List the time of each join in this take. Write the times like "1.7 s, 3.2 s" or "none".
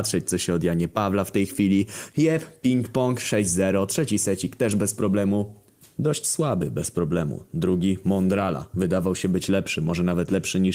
6.0 s